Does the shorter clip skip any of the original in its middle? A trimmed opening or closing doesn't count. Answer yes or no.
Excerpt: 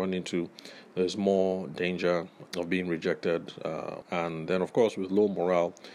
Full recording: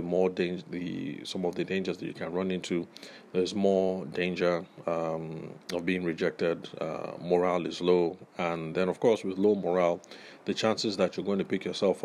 yes